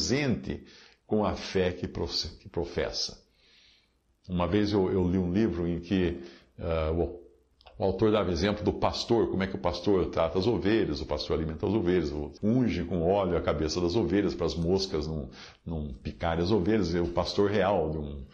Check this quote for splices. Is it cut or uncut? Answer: cut